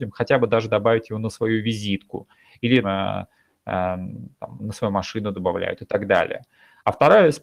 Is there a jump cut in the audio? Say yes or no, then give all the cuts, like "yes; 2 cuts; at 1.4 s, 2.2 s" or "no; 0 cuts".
yes; 2 cuts; at 2.8 s, 4.6 s